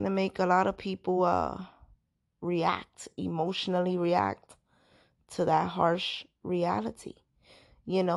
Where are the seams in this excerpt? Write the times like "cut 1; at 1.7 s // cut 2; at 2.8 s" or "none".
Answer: none